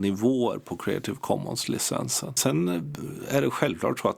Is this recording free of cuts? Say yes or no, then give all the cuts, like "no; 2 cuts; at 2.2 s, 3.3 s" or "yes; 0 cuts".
yes; 0 cuts